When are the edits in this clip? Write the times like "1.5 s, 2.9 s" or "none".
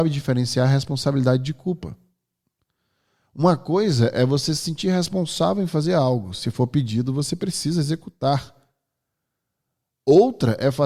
none